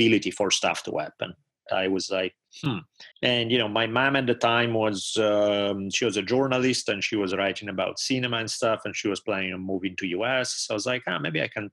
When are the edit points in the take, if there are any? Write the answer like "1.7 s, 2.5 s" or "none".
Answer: 1.7 s, 3.1 s